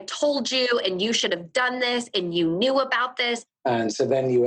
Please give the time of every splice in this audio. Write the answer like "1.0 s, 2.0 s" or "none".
3.5 s

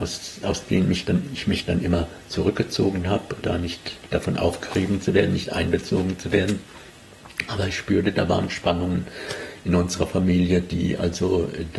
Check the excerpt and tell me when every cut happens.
3.4 s

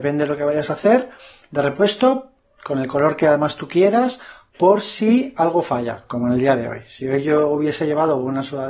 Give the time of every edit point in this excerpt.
none

